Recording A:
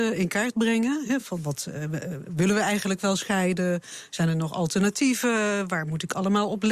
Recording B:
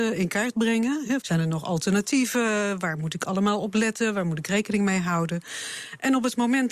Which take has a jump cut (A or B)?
B